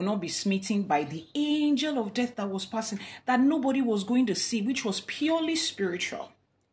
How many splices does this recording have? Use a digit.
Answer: 0